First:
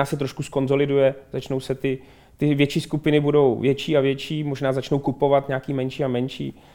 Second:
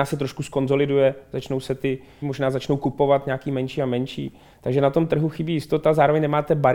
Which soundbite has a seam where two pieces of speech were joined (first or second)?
second